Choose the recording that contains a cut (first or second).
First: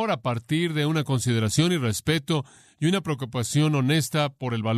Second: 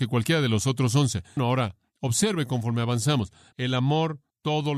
second